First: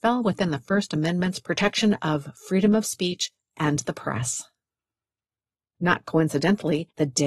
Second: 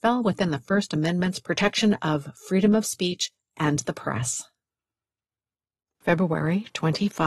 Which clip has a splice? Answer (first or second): first